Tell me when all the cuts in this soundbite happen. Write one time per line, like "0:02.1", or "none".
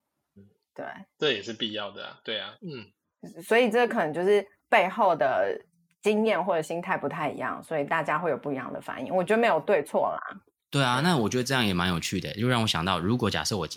0:02.6